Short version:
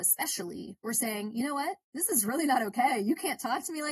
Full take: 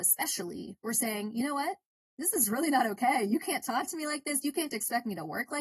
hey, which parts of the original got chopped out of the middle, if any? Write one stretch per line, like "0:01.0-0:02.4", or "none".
0:01.8-0:02.1